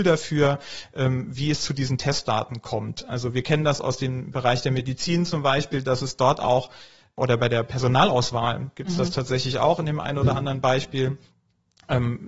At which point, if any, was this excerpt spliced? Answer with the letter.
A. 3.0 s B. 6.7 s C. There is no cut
C